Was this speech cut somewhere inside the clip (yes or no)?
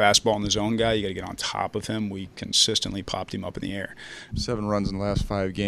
yes